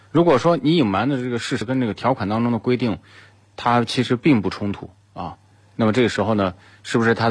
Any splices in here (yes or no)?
no